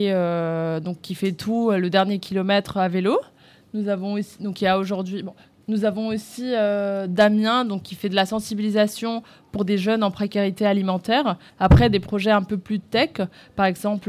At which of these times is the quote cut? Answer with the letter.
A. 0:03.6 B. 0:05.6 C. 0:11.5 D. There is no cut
C